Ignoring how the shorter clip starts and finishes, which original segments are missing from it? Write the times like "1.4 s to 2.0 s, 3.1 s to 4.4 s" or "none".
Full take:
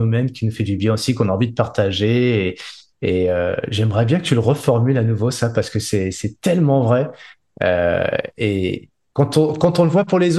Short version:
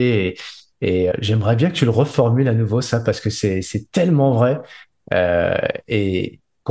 3.3 s to 3.6 s